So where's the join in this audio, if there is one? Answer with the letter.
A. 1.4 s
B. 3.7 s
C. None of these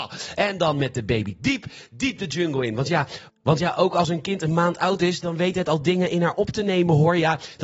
C